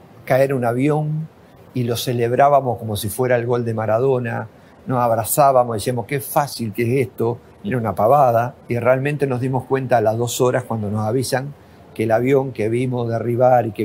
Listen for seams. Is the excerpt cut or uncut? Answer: cut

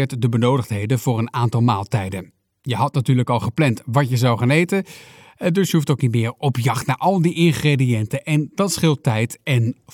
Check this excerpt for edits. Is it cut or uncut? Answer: uncut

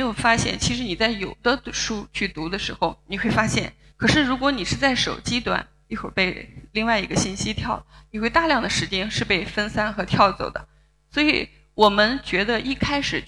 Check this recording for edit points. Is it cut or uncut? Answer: cut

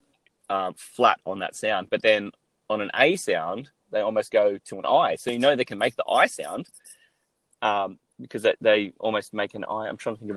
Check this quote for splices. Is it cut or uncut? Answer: uncut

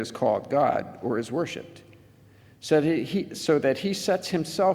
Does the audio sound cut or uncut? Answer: uncut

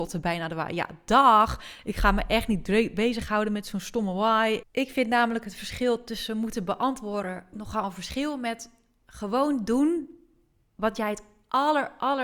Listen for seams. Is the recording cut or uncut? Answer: cut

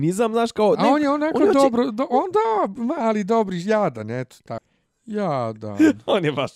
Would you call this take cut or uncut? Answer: cut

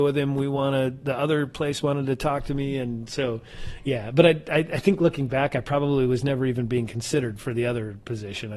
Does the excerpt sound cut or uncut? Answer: uncut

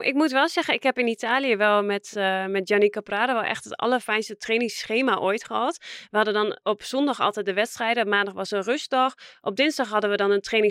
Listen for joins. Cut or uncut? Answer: uncut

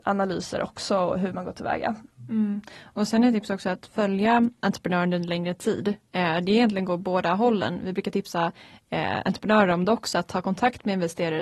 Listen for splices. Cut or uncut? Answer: uncut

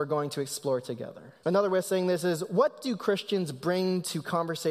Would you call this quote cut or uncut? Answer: cut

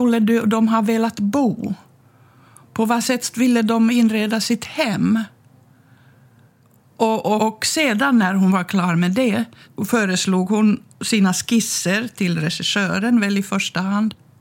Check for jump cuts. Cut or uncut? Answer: cut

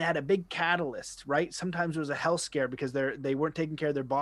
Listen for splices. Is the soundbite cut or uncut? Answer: uncut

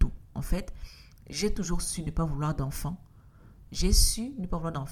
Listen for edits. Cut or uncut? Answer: cut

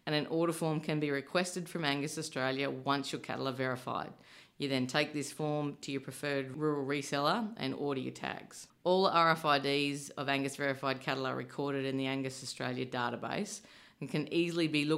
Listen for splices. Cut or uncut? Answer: cut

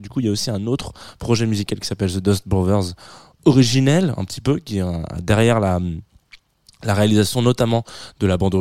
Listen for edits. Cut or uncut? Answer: uncut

